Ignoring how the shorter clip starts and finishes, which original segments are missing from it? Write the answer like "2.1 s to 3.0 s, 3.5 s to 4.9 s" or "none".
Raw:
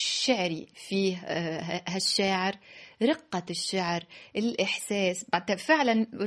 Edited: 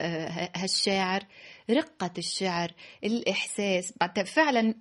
none